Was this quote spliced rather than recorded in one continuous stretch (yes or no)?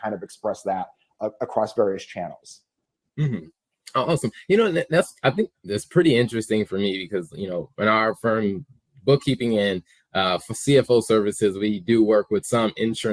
no